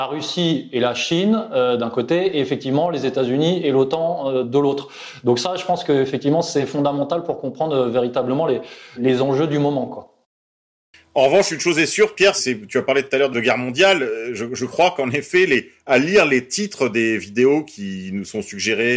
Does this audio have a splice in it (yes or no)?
no